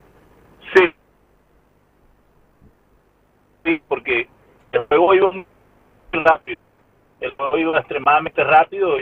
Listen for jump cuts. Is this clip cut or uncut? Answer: uncut